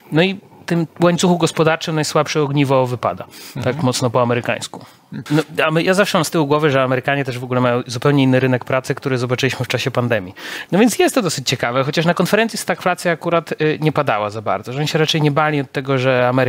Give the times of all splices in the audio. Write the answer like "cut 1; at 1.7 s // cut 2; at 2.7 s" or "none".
cut 1; at 5.3 s // cut 2; at 10.7 s